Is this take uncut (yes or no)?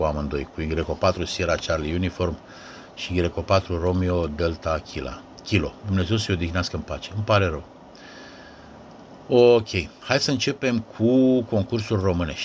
no